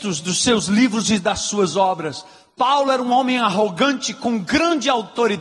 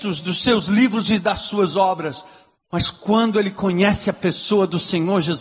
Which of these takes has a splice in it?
second; 1 cut; at 2.5 s

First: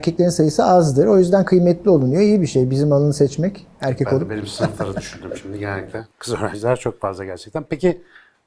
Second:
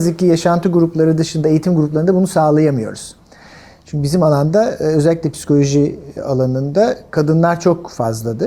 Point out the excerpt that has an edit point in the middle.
first; 1 cut; at 6.1 s

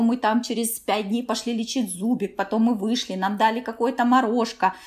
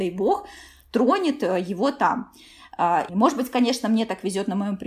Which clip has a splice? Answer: second; 1 cut; at 3.1 s

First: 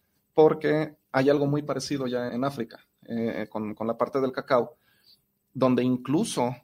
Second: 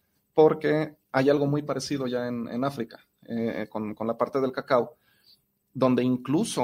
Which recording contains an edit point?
first; 1 cut; at 2.3 s

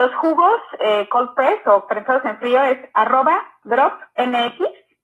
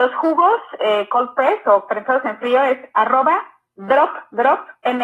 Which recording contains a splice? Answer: first; 1 cut; at 3.6 s

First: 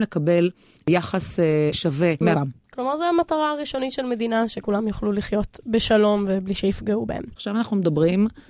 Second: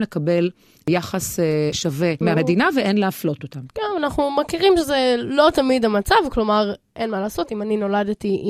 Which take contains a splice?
first; 1 cut; at 2.3 s

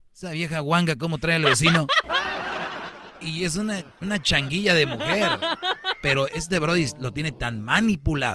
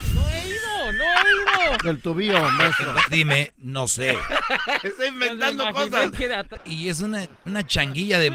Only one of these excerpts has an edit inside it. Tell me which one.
second; 2 cuts; at 3.1 s, 6.6 s

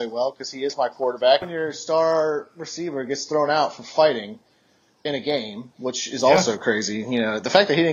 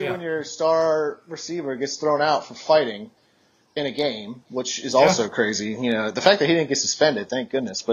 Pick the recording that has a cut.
first; 1 cut; at 1.4 s

